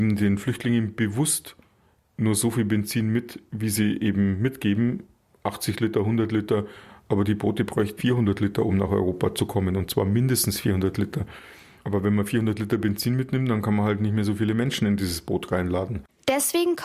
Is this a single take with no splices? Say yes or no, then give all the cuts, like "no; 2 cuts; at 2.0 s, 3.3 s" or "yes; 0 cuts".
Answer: no; 1 cut; at 8.0 s